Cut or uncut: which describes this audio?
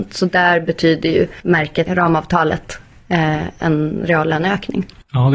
cut